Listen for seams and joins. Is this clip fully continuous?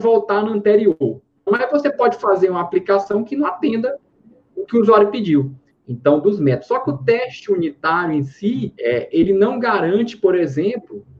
no; 3 cuts; at 1.5 s, 5.7 s, 8.8 s

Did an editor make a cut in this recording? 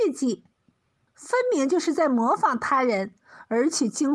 yes; 1 cut; at 1.1 s

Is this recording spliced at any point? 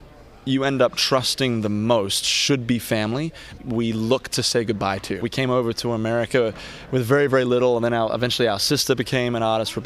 yes; 2 cuts; at 3.6 s, 5.2 s

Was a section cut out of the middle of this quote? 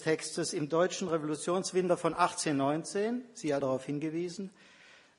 yes; 1 cut; at 3.6 s

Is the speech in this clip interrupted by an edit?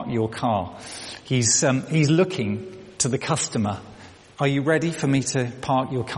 no; 0 cuts

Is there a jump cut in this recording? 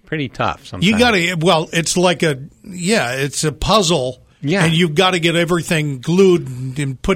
no; 0 cuts

